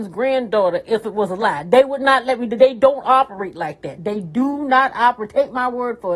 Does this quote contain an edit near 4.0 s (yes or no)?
no